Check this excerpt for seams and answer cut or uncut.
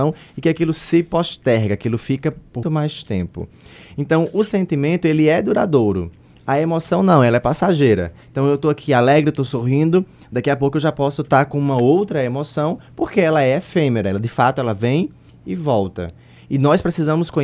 cut